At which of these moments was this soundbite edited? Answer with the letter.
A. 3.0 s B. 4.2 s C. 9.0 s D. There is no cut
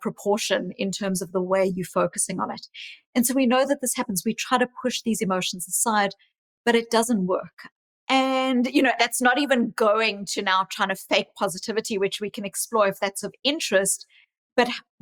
C